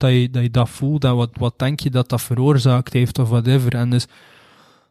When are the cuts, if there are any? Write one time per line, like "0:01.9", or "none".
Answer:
none